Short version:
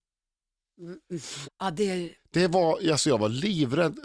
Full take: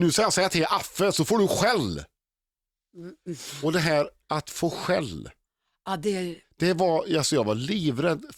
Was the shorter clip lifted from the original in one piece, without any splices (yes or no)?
no